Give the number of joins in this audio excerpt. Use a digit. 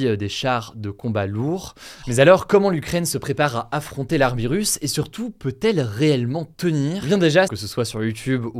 2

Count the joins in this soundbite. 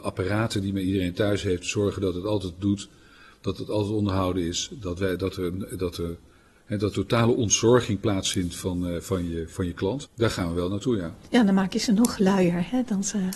3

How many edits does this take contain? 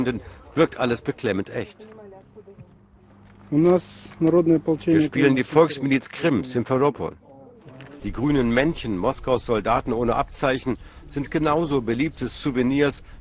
1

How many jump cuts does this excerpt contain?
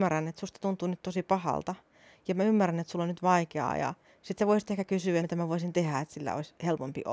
1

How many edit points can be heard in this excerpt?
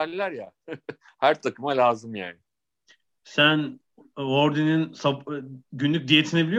0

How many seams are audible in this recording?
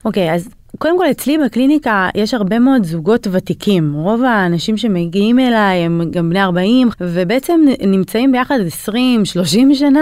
1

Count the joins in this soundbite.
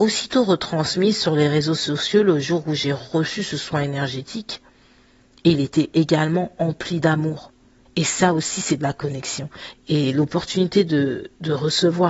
2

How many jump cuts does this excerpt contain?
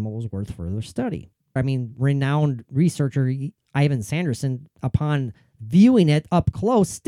1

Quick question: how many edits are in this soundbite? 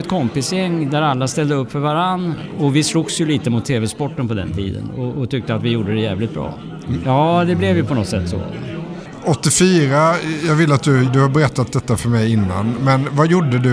2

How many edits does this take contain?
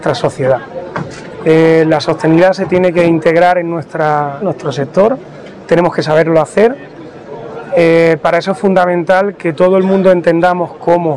1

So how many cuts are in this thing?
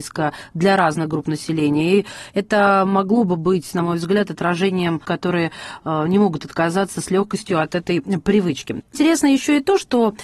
1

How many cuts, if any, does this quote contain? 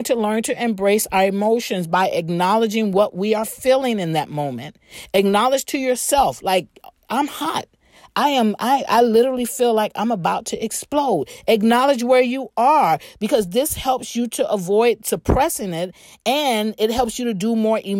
0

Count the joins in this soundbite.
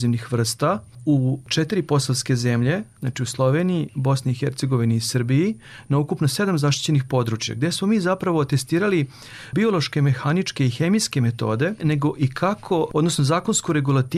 2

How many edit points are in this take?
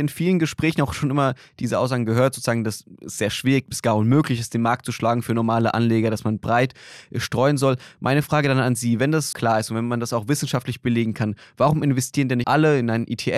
2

